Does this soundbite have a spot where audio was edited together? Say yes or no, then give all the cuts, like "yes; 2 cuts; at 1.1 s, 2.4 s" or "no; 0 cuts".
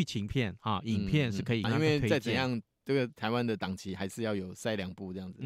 yes; 1 cut; at 1.6 s